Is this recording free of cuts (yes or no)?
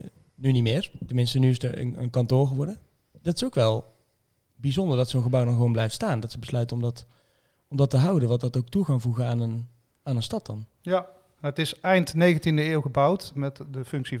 yes